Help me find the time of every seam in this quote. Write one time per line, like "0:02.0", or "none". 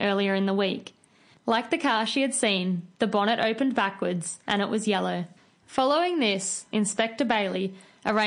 0:01.3
0:06.7